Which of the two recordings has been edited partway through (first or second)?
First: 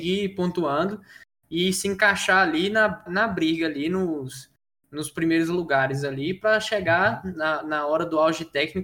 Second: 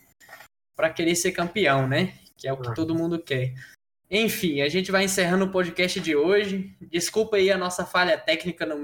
first